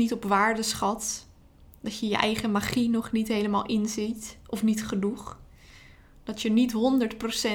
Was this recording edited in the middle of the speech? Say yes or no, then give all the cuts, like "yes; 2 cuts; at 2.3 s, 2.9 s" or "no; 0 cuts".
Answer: no; 0 cuts